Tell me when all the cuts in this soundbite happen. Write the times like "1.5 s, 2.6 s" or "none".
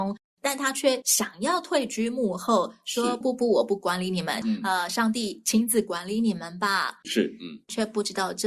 3.2 s, 4.4 s, 7.0 s